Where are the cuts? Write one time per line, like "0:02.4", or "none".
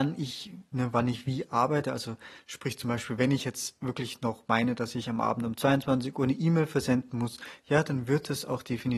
none